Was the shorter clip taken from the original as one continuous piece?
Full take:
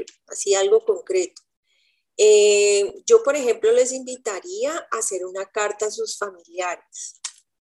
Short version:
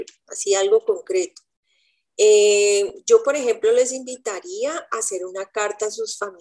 yes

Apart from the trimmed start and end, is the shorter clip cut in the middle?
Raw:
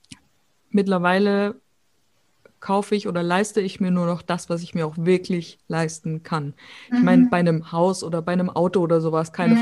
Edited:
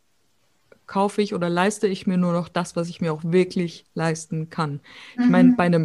no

